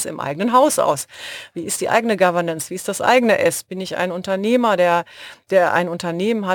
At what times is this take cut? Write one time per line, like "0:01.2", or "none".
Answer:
none